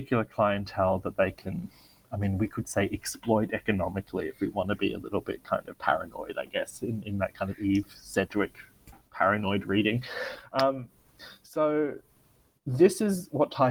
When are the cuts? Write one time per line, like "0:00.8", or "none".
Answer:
none